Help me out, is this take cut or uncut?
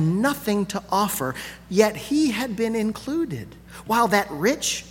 cut